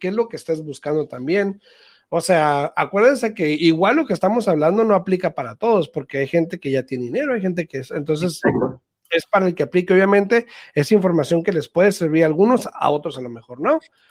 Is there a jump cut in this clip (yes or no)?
no